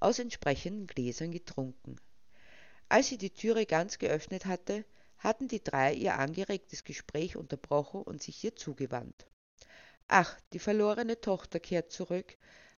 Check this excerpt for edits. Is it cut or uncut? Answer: uncut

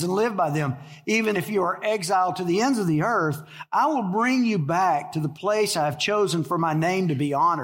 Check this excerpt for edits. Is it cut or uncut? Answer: cut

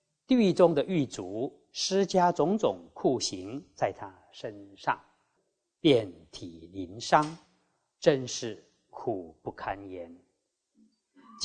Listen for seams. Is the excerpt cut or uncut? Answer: uncut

